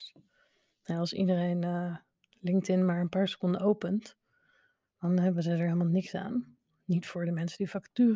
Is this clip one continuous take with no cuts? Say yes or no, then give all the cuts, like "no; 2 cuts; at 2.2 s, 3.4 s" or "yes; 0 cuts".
yes; 0 cuts